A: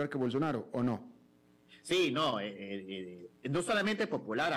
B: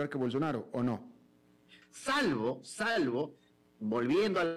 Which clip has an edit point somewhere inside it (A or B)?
B